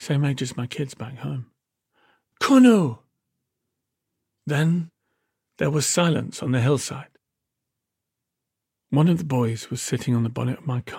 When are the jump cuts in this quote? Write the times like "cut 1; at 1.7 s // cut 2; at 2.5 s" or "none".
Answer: cut 1; at 2.3 s